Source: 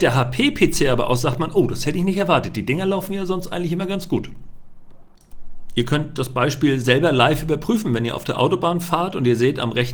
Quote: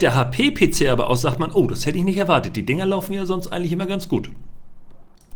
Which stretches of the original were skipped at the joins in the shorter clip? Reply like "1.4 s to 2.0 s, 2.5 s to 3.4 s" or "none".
none